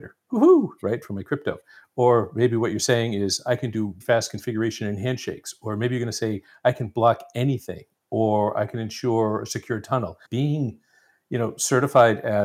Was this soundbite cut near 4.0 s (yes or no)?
yes